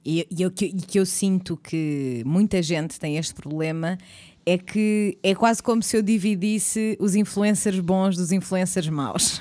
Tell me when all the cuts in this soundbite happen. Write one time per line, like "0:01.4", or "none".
none